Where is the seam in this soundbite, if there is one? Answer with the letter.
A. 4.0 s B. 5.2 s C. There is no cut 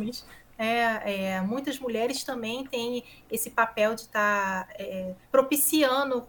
B